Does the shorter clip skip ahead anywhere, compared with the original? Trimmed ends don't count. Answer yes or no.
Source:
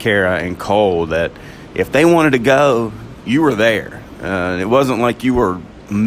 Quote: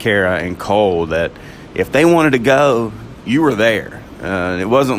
no